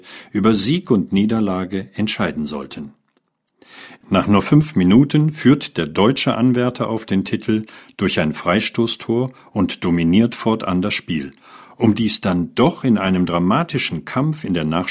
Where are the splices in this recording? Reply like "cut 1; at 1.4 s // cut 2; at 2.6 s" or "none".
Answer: cut 1; at 4.0 s